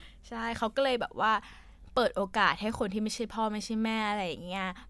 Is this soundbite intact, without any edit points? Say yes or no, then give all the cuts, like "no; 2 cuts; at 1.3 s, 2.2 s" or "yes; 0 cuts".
yes; 0 cuts